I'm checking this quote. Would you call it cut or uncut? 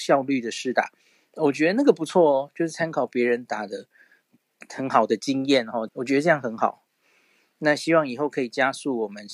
cut